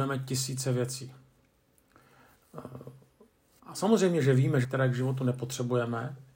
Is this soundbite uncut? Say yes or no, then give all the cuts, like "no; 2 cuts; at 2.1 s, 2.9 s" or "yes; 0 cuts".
no; 2 cuts; at 3.6 s, 4.6 s